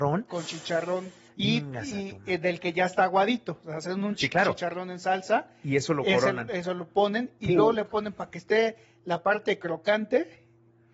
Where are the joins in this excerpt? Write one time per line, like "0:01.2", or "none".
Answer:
none